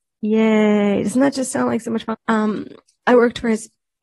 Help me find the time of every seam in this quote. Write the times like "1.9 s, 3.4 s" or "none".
2.1 s